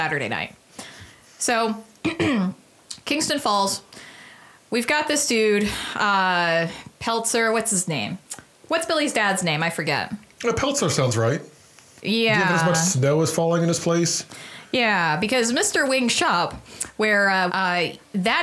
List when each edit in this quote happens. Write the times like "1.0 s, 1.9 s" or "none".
12.0 s, 17.5 s